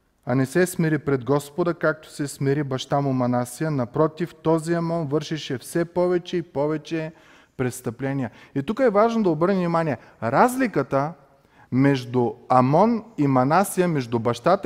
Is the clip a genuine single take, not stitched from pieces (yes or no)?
yes